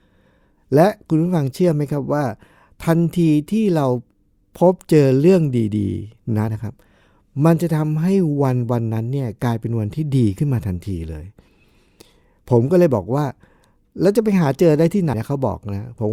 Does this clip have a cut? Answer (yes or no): yes